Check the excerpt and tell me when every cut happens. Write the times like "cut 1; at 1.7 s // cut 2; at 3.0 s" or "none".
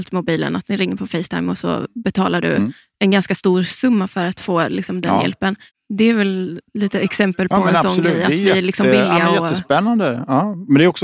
none